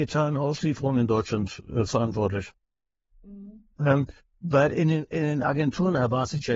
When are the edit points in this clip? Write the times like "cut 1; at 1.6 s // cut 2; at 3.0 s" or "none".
cut 1; at 3.8 s